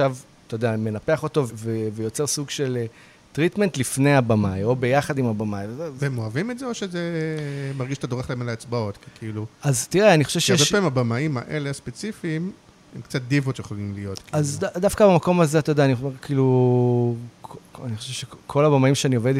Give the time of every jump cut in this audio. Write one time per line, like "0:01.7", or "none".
0:01.5